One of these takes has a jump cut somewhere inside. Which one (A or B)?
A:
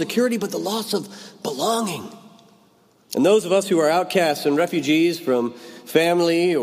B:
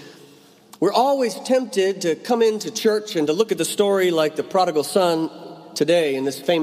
A